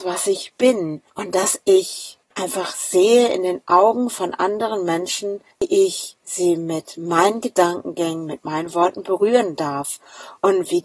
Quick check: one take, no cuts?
no; 3 cuts; at 1.1 s, 2.2 s, 5.5 s

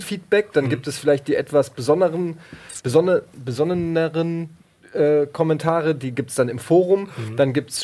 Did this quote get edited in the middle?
no; 0 cuts

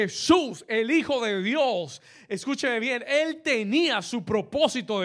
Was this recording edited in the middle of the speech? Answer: no; 0 cuts

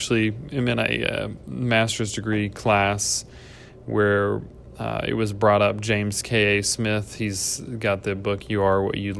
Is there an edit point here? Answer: no; 0 cuts

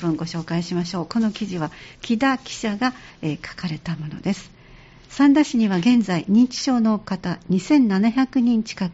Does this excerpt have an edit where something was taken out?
no; 0 cuts

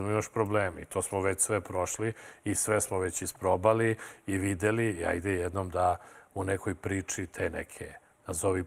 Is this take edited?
no; 0 cuts

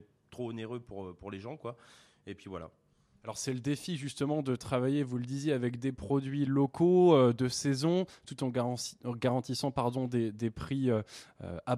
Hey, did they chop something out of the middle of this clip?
no; 0 cuts

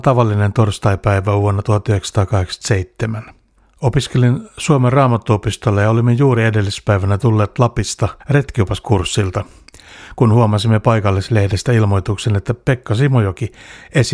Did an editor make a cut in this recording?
yes; 1 cut; at 8.2 s

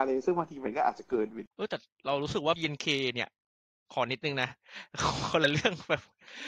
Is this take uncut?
no; 1 cut; at 1.5 s

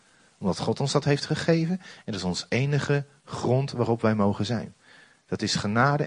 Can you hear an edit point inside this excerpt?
no; 0 cuts

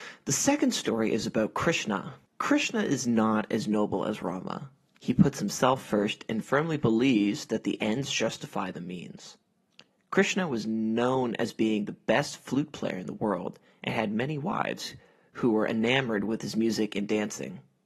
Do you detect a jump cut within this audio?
yes; 1 cut; at 2.3 s

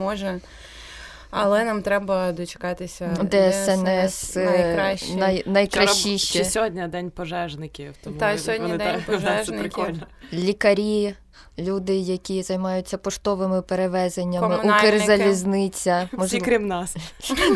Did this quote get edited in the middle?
yes; 1 cut; at 3.2 s

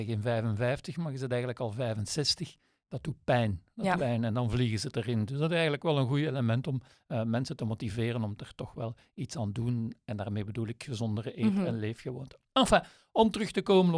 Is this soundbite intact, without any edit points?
no; 1 cut; at 4.0 s

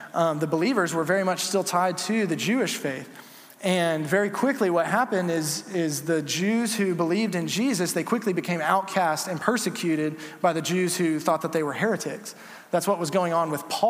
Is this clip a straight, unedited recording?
yes; 0 cuts

